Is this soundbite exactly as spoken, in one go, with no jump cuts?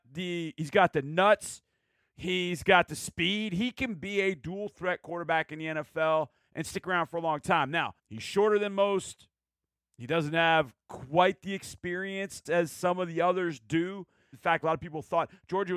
no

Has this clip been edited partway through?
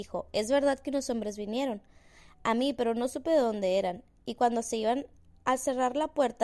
no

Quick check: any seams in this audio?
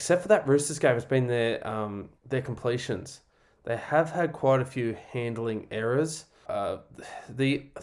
yes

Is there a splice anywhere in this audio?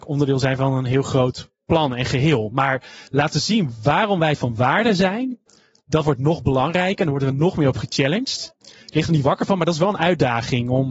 no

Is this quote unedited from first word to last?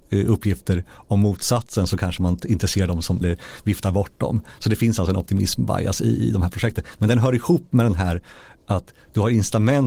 no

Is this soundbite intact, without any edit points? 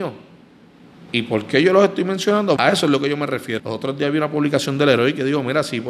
no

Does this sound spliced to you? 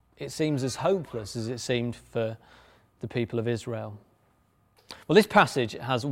no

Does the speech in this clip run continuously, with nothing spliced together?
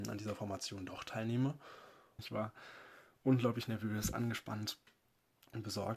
no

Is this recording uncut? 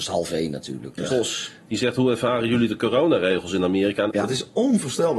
no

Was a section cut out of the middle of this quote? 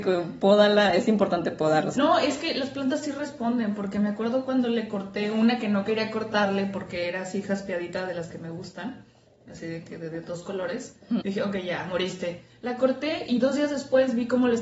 yes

